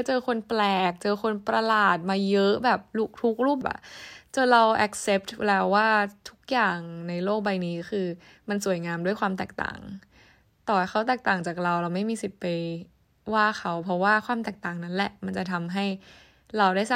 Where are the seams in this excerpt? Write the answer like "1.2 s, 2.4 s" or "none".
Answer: 3.6 s